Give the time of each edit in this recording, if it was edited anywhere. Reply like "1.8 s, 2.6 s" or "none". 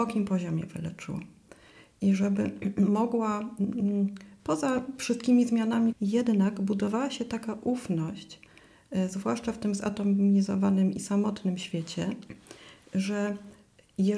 5.9 s